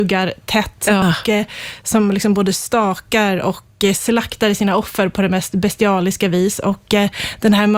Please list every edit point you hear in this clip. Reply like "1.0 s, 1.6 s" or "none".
1.0 s